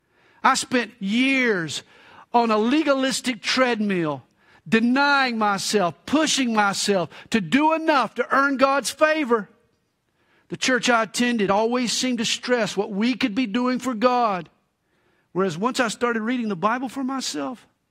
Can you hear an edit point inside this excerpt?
no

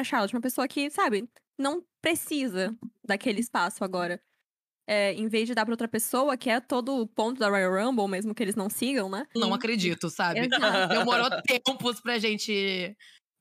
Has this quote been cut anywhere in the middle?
yes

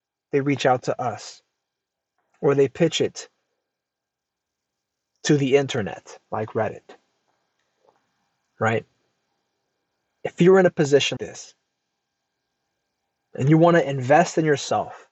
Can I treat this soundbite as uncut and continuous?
no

